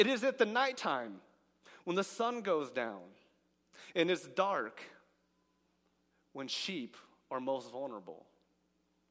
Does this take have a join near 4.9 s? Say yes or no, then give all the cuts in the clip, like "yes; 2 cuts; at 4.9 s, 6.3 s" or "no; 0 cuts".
no; 0 cuts